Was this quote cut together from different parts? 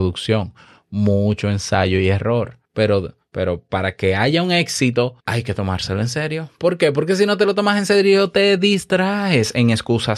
yes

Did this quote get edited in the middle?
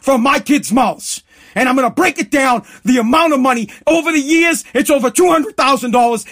no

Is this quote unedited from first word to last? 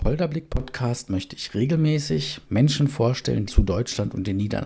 no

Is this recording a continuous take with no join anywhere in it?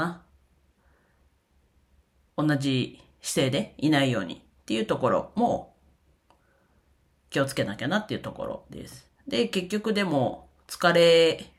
yes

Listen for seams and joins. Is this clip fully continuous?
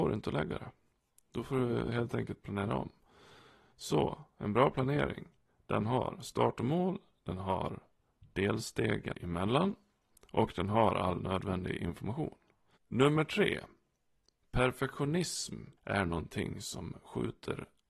no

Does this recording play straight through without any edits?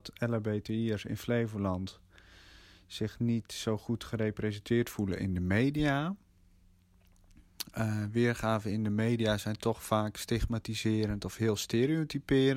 yes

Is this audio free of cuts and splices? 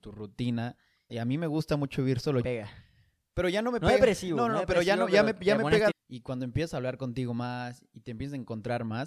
no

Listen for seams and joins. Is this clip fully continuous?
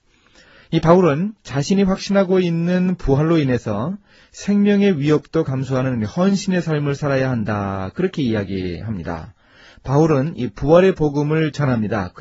yes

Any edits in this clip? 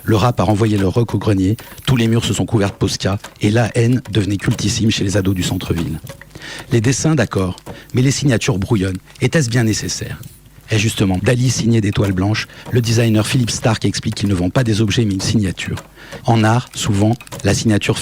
yes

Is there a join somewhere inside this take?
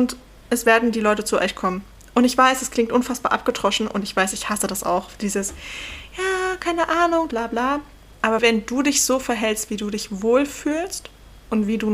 yes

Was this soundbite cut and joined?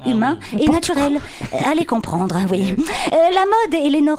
no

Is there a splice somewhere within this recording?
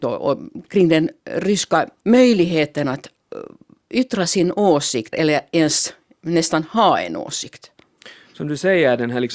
yes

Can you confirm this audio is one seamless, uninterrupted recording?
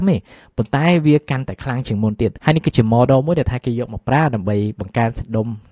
yes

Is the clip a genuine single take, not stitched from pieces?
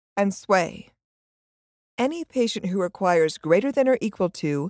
no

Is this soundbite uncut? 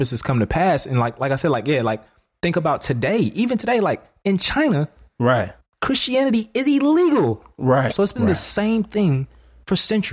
no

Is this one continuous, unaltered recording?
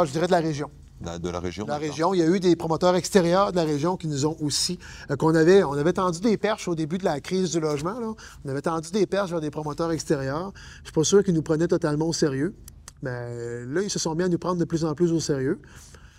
yes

